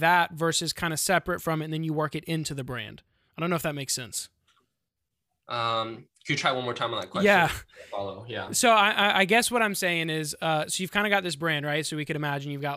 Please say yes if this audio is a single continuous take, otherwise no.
yes